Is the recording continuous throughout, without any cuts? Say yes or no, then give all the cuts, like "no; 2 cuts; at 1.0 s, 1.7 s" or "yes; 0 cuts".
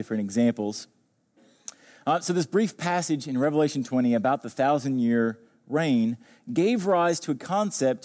yes; 0 cuts